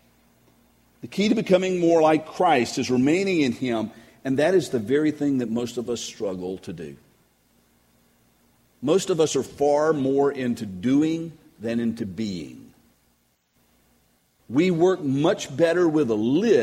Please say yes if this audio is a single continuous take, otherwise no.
yes